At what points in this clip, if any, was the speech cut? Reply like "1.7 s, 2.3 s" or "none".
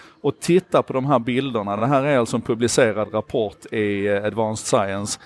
none